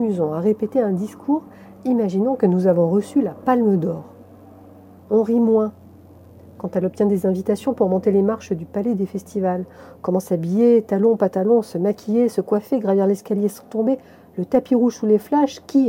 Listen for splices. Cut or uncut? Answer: cut